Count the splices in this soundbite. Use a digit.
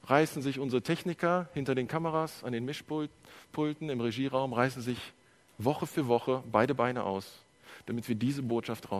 0